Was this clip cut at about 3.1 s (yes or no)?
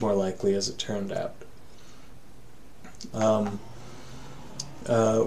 yes